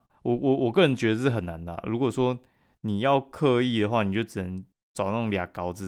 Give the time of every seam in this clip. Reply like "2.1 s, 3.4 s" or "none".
none